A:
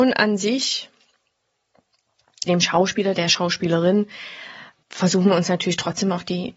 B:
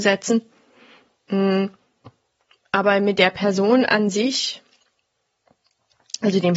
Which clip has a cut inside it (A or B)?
A